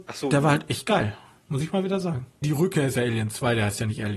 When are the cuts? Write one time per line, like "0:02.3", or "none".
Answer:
0:02.4